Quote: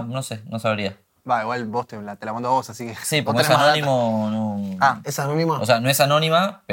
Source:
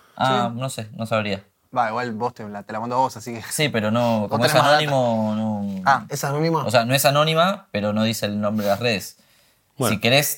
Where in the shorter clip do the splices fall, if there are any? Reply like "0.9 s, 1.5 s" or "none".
3.2 s